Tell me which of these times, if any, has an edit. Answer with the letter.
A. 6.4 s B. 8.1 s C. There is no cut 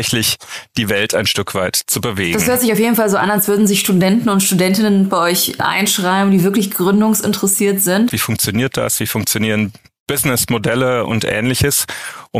B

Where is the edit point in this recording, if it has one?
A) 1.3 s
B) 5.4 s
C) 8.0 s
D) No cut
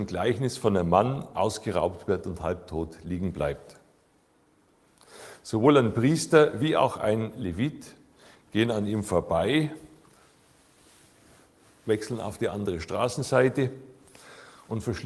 A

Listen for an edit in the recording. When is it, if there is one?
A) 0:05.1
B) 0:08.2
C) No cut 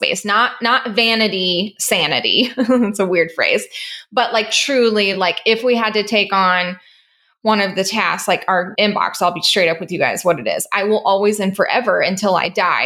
C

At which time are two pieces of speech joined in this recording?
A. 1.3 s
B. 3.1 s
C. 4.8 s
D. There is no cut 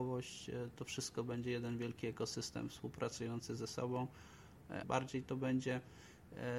C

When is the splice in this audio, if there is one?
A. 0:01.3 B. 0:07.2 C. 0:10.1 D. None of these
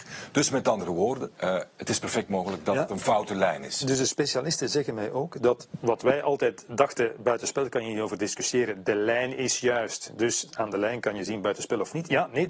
A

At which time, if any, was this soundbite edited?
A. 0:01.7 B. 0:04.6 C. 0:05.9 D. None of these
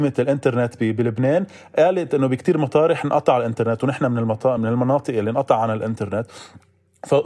D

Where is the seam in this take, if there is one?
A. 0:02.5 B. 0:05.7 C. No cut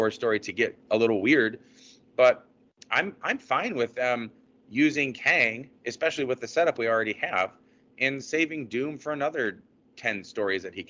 C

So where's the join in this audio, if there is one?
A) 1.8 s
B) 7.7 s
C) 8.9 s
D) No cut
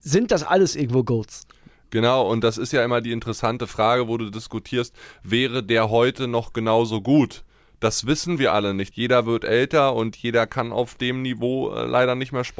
C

